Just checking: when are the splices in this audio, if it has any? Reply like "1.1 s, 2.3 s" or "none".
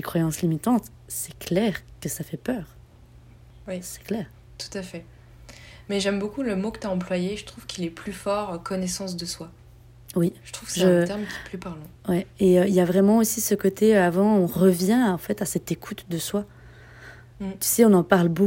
12.0 s